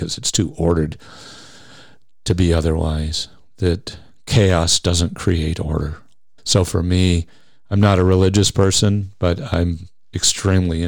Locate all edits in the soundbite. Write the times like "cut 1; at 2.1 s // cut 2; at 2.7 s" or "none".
cut 1; at 6.4 s

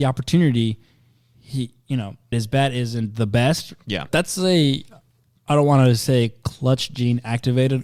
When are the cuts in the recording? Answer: cut 1; at 2.3 s // cut 2; at 4.1 s

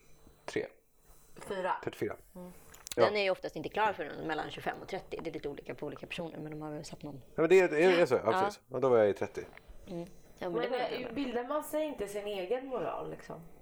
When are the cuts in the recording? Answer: cut 1; at 3.0 s

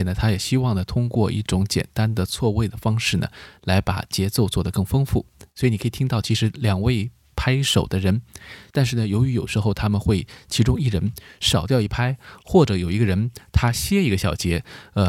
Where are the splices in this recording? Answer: cut 1; at 8.7 s

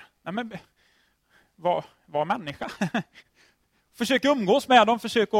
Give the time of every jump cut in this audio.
none

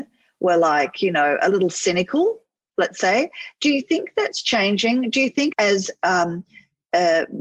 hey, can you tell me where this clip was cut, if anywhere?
cut 1; at 5.5 s

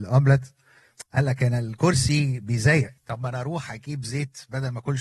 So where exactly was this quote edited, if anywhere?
cut 1; at 3.0 s

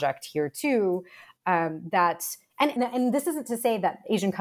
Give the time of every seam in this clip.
cut 1; at 2.8 s

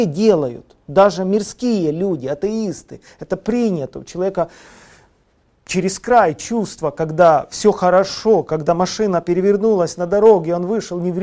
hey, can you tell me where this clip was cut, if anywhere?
none

